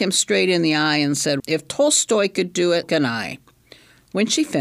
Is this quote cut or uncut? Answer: cut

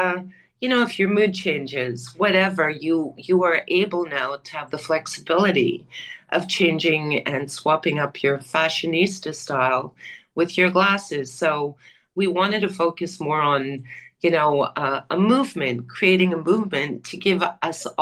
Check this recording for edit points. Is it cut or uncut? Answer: uncut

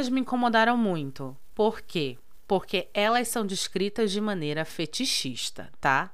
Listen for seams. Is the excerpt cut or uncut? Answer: uncut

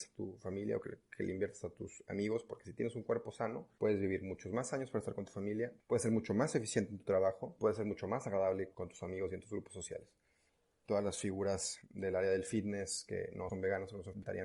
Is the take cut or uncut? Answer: cut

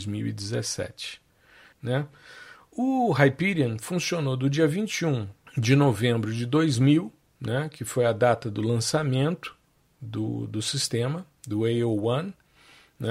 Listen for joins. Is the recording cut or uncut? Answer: cut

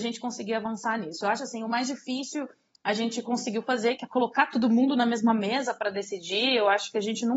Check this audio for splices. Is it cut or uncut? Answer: uncut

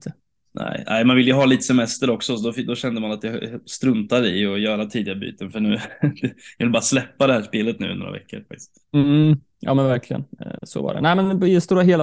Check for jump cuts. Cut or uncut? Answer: uncut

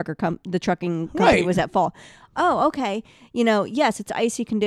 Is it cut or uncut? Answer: uncut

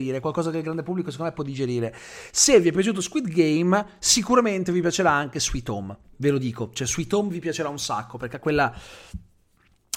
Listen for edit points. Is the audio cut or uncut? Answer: cut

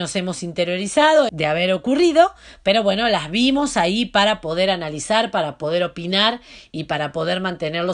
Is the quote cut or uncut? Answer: cut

